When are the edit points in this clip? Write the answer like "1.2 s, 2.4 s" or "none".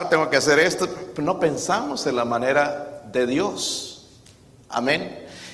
none